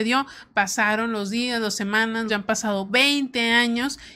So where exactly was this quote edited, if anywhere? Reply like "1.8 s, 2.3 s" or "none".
2.3 s